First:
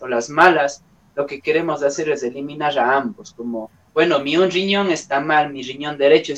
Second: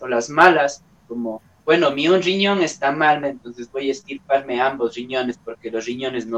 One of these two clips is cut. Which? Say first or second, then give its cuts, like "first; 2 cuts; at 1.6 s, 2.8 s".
second; 2 cuts; at 1.0 s, 3.2 s